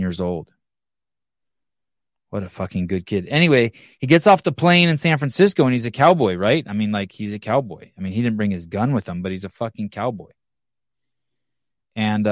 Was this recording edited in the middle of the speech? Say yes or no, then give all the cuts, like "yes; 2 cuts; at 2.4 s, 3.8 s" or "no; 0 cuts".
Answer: no; 0 cuts